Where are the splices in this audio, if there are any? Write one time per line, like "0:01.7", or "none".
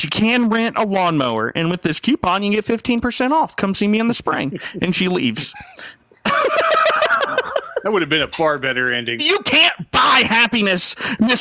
0:09.2